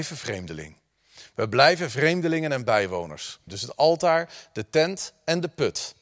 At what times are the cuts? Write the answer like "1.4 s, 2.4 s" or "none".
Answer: 3.5 s